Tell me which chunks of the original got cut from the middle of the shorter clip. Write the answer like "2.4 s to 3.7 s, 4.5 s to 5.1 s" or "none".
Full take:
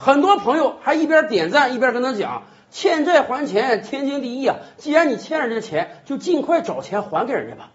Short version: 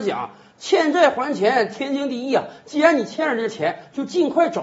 none